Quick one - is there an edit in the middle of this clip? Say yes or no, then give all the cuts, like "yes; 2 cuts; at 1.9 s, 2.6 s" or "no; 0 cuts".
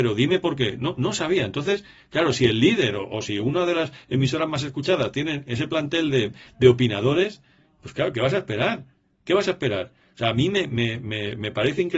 no; 0 cuts